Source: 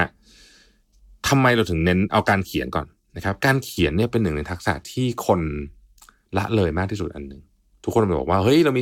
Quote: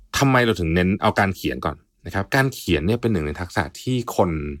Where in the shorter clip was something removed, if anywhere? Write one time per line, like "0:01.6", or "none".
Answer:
none